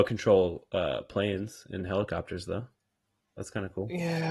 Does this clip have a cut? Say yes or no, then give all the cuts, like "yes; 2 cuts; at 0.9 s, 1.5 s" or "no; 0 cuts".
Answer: no; 0 cuts